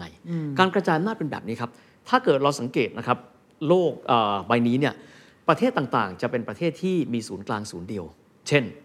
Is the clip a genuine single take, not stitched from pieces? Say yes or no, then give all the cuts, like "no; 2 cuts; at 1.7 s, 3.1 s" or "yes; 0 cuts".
yes; 0 cuts